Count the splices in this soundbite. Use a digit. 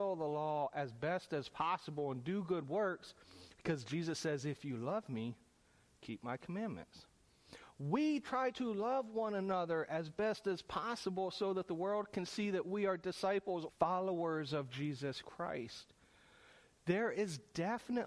1